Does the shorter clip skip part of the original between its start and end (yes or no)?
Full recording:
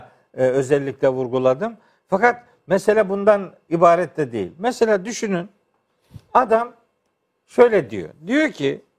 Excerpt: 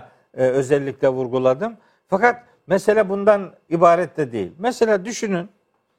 no